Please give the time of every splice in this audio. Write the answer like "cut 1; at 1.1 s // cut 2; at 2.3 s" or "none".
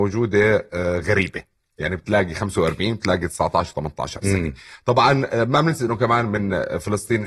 none